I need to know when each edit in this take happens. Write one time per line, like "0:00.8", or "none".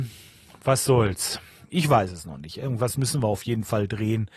0:01.7